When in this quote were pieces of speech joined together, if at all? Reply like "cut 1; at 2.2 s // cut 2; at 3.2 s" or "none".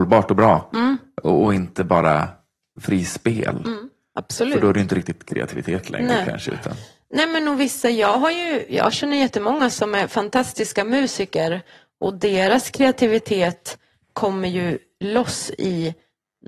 none